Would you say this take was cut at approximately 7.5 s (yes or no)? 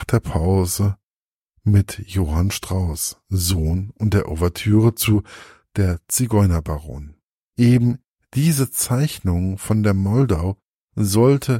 yes